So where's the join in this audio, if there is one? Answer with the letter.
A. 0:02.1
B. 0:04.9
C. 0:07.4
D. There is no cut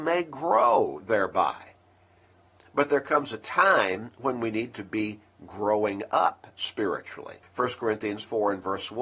C